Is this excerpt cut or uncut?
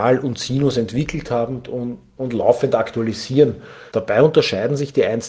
cut